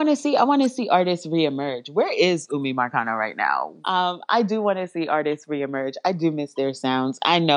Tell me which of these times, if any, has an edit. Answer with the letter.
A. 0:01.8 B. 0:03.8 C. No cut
B